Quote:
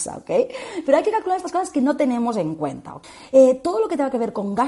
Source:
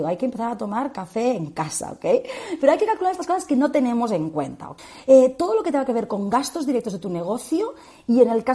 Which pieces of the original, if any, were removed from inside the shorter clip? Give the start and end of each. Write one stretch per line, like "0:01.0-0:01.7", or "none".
none